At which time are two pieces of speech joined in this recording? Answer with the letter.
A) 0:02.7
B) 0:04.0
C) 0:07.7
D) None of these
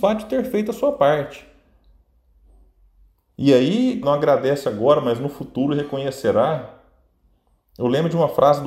B